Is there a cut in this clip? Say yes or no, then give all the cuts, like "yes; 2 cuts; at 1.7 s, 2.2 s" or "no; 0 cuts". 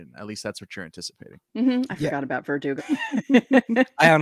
yes; 2 cuts; at 1.5 s, 2.8 s